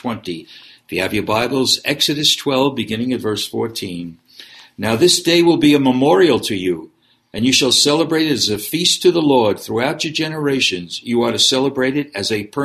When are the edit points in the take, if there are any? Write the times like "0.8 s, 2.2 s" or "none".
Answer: none